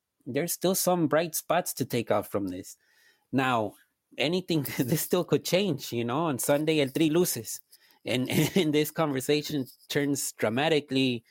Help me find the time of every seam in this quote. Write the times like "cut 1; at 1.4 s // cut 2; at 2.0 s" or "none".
none